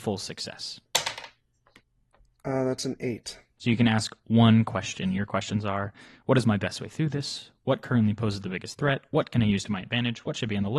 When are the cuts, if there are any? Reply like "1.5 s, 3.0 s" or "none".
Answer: 3.6 s